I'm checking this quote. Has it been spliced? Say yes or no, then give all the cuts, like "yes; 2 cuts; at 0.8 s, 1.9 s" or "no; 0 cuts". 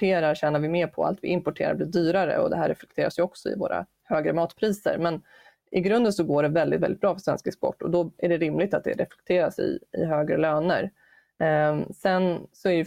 no; 0 cuts